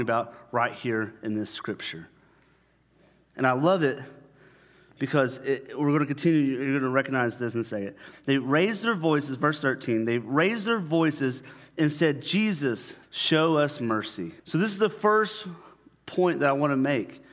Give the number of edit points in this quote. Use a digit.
2